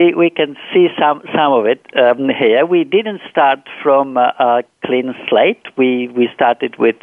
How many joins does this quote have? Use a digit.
0